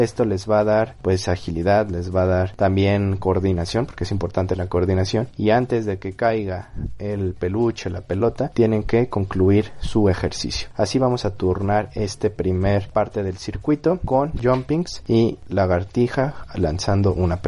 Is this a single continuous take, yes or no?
yes